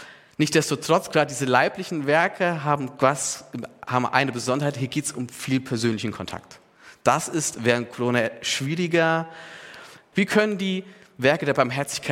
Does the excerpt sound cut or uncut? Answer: cut